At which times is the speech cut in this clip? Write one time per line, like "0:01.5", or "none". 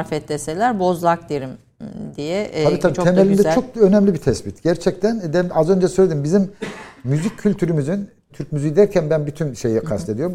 0:08.3